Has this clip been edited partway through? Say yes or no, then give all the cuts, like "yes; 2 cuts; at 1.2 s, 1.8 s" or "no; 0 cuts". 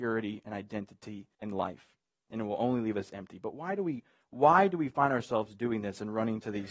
yes; 1 cut; at 1.3 s